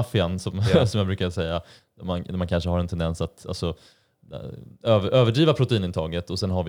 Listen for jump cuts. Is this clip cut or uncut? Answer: uncut